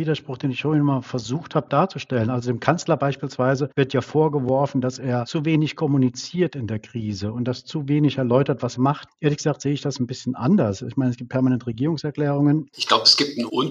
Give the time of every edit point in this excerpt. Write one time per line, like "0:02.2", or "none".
0:08.8
0:12.7